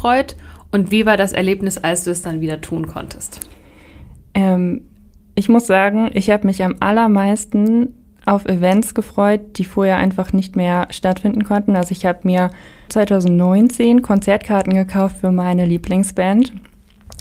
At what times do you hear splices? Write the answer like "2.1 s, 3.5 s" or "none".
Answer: 12.9 s

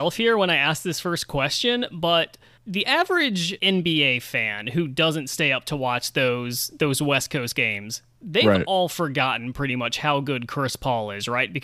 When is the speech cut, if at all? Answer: none

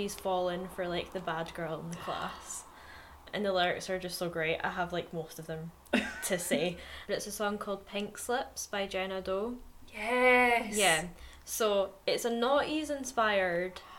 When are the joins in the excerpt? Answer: 7.0 s

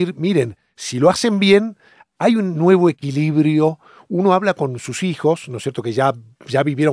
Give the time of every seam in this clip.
none

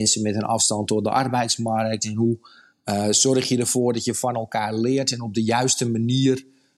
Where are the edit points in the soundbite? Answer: none

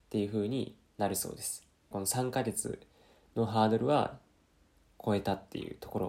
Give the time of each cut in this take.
1.9 s

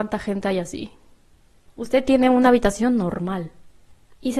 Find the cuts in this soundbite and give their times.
1.7 s

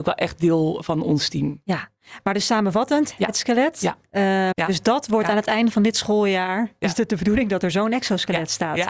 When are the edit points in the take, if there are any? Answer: 3.2 s, 4.5 s

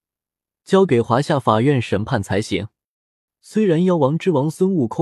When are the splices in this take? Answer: 3.3 s

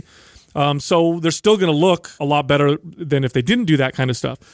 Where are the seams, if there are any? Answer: 2.2 s

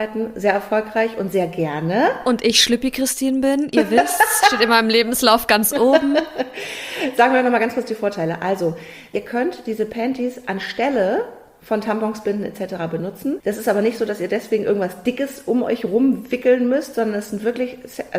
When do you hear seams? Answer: none

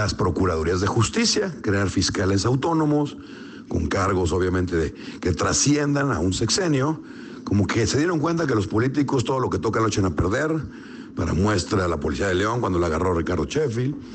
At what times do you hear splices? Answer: none

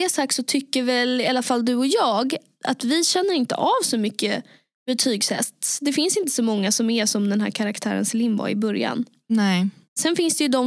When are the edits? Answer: none

